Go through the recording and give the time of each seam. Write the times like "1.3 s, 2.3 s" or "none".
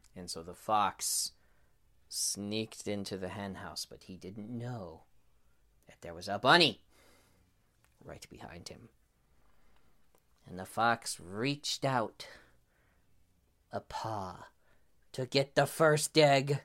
none

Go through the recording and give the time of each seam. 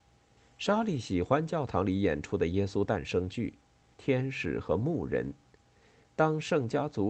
3.9 s

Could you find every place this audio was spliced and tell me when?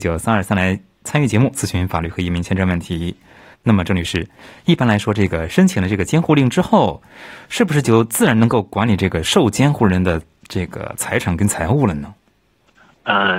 3.5 s

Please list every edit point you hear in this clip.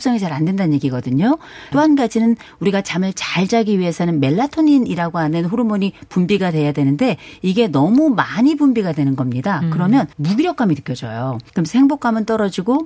1.7 s, 10.1 s, 11.5 s

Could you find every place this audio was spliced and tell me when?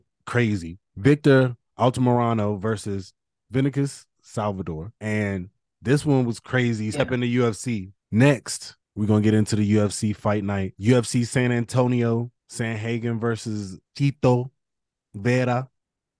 6.9 s

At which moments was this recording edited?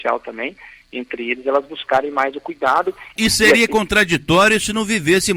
3.2 s

